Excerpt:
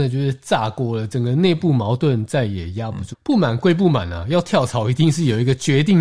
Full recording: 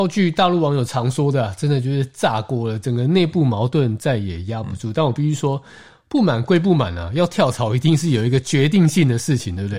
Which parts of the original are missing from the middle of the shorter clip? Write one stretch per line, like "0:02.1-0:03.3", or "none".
0:04.8-0:06.0